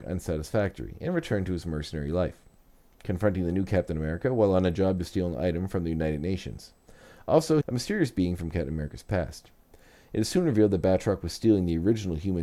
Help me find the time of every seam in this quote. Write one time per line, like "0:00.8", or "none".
0:07.6